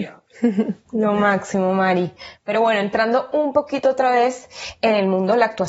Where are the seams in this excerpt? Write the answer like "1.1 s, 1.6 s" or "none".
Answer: none